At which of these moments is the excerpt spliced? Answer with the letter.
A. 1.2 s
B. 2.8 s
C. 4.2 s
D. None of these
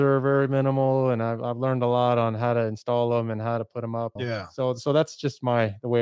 C